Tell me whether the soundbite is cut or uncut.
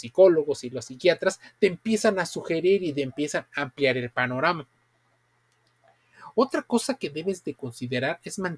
uncut